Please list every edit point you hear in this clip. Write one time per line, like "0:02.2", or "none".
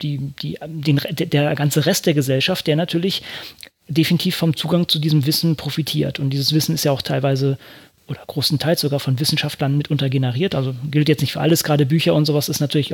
none

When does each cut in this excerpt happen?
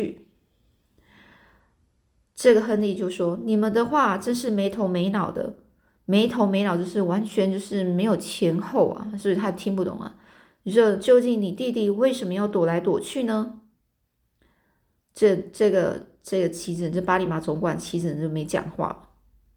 none

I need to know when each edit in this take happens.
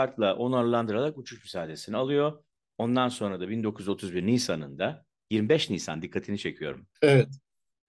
0:06.9

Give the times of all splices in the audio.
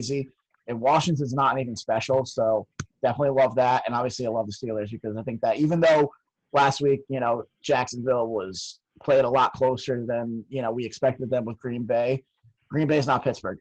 none

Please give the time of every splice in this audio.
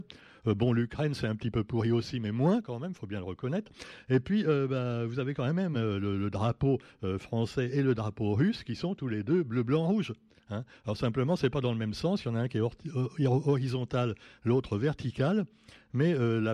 none

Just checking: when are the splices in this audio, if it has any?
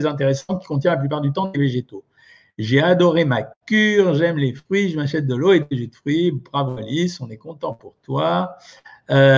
none

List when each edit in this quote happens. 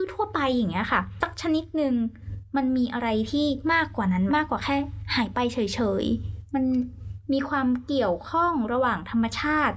0:04.3

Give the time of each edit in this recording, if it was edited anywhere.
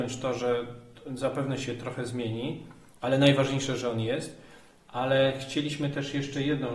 none

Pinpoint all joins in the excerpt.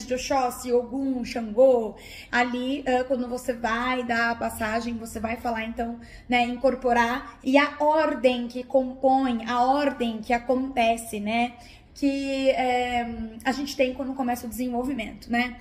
0:02.3
0:07.4
0:11.8

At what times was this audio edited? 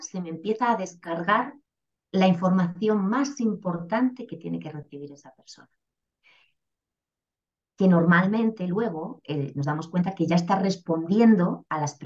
none

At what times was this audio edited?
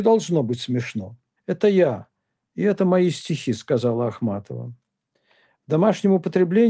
0:01.4

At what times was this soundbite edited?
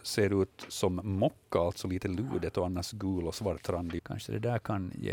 0:04.0

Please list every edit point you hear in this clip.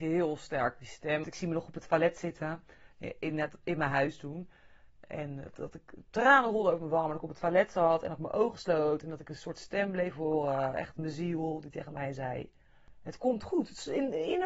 0:01.2

